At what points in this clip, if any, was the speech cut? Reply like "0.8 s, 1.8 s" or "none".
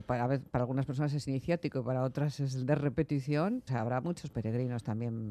3.7 s